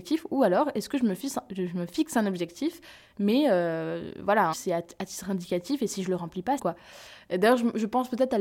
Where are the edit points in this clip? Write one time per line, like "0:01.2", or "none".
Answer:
0:04.5
0:06.6